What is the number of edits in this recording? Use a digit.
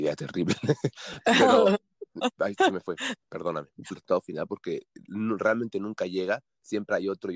1